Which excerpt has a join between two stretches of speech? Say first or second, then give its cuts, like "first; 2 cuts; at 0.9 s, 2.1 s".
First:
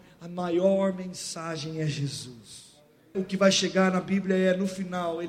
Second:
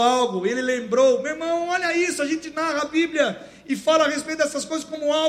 first; 1 cut; at 3.1 s